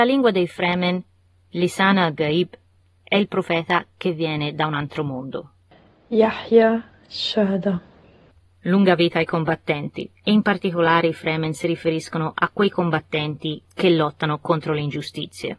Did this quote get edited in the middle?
no; 0 cuts

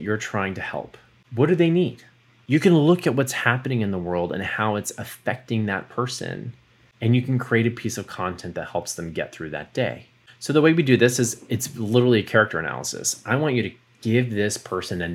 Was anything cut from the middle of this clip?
no; 0 cuts

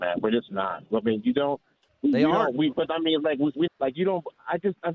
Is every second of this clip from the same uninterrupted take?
no; 2 cuts; at 1.9 s, 3.7 s

